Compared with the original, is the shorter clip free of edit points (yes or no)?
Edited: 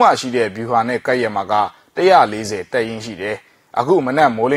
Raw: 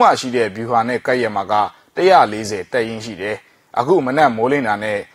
yes